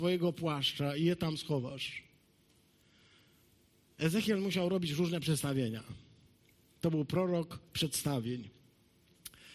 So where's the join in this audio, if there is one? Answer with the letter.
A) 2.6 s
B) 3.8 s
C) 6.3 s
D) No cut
D